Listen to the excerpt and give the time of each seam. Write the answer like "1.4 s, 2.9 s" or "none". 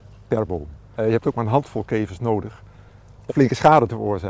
0.9 s, 3.3 s

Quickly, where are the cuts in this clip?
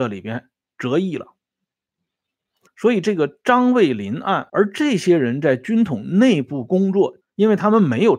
2.7 s, 4.5 s, 7.2 s

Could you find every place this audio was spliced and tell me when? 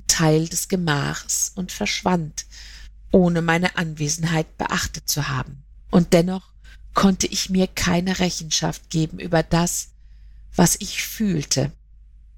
5.8 s

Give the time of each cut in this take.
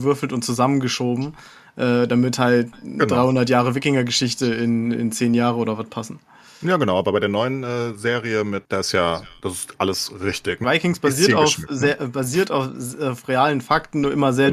8.7 s, 10.6 s

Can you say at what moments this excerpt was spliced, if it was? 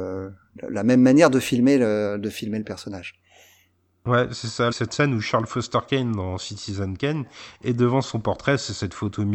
4.7 s

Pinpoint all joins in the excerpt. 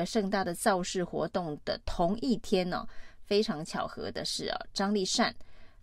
none

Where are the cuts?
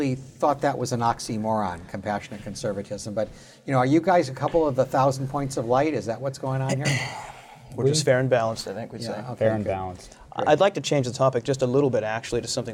none

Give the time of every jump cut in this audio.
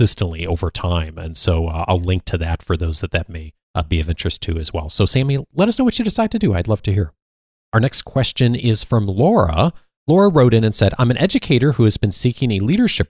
none

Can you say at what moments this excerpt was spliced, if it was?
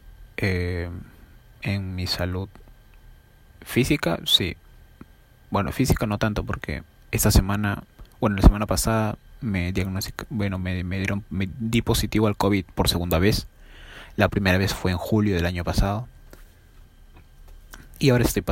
none

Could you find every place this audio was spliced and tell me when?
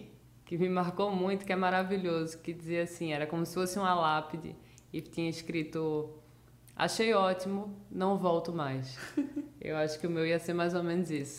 none

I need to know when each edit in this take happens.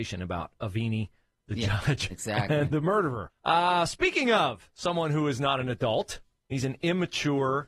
3.3 s

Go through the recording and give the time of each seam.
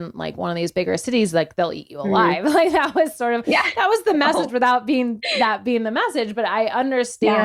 none

